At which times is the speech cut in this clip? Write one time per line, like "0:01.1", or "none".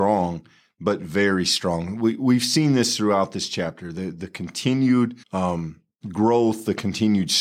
0:05.2